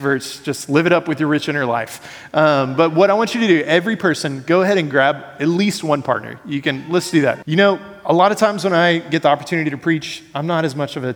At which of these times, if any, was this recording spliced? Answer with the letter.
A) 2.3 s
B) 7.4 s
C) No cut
B